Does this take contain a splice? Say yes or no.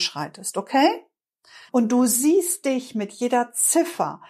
yes